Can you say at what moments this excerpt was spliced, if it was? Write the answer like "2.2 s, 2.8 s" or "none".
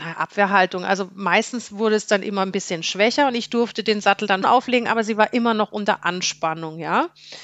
4.4 s